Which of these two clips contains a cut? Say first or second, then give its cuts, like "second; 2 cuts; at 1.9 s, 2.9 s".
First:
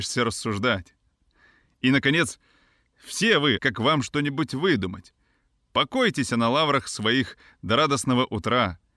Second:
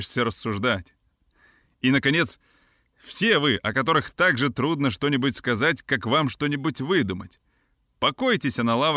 first; 1 cut; at 3.6 s